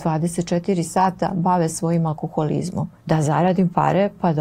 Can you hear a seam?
yes; 1 cut; at 3.0 s

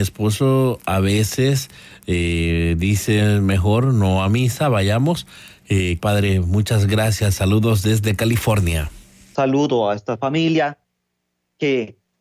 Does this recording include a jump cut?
yes; 2 cuts; at 6.0 s, 9.3 s

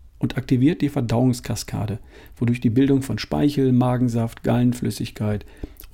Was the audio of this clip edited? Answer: no; 0 cuts

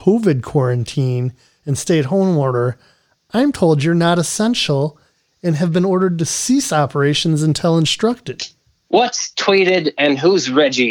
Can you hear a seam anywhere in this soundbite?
yes; 1 cut; at 8.8 s

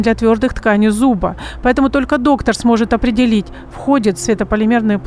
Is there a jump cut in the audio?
no; 0 cuts

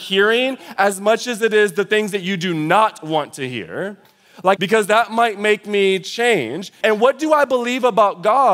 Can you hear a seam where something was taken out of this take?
yes; 2 cuts; at 4.6 s, 6.8 s

